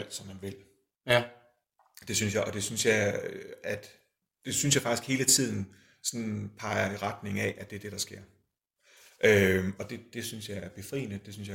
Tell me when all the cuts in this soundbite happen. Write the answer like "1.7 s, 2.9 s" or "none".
none